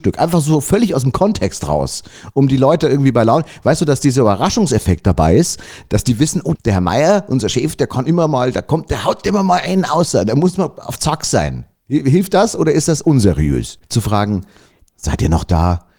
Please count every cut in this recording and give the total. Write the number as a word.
two